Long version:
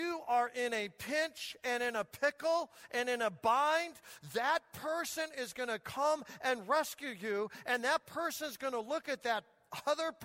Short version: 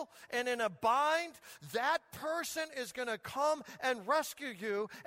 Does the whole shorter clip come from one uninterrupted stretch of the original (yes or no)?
yes